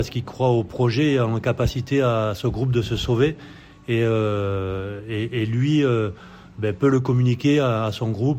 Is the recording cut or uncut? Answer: uncut